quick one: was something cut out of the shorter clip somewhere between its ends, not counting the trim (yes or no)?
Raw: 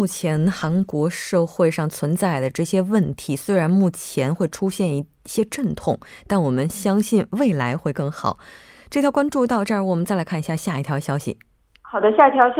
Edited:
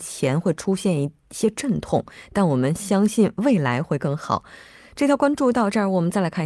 no